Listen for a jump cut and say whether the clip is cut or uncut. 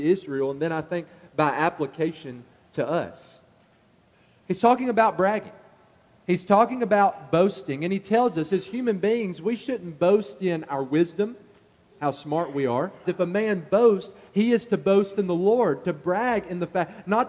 cut